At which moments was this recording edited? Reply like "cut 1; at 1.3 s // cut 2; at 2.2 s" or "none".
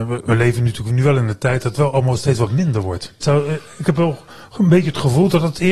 cut 1; at 3.2 s